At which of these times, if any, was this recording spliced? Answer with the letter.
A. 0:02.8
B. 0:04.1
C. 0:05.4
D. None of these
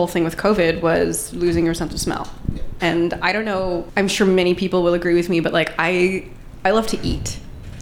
A